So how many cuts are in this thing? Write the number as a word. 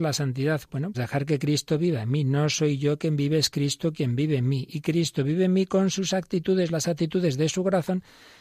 one